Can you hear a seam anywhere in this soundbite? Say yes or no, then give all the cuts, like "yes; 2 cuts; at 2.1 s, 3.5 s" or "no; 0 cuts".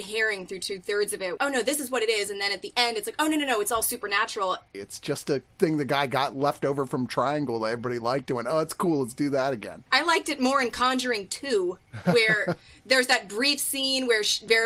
yes; 2 cuts; at 1.4 s, 4.7 s